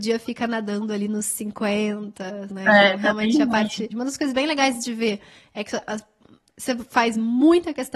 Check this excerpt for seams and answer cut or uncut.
cut